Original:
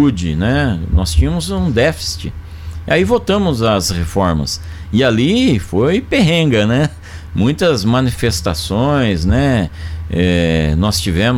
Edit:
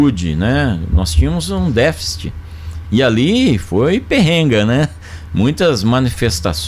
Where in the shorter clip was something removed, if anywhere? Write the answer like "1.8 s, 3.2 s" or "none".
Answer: 2.8 s